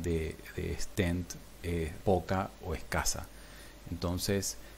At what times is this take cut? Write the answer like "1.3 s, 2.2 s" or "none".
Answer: 2.0 s